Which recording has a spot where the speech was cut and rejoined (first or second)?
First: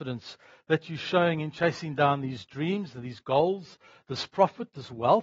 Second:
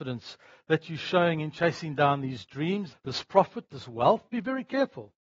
second